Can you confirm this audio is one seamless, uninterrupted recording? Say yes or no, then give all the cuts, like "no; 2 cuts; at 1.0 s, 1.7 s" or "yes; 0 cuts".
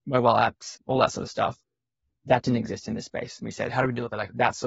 yes; 0 cuts